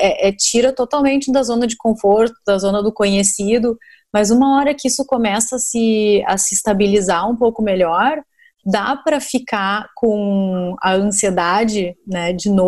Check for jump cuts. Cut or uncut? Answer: uncut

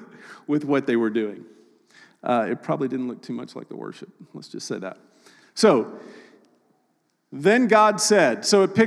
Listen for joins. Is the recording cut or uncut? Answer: uncut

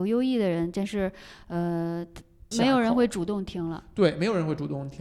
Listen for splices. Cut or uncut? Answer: cut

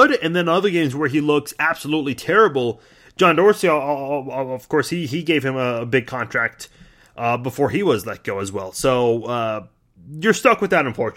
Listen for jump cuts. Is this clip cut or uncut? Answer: uncut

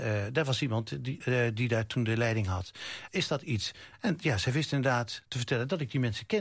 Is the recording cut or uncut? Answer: cut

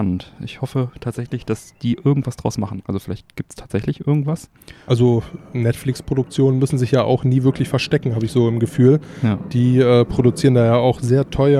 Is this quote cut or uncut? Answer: cut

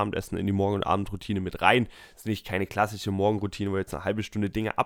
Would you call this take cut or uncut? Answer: uncut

